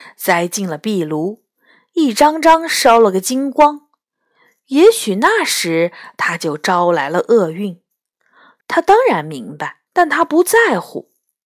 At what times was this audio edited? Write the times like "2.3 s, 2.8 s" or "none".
8.6 s, 9.9 s